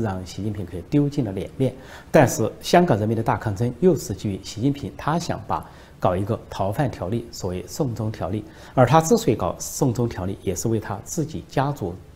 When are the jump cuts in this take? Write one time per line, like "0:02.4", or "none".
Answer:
none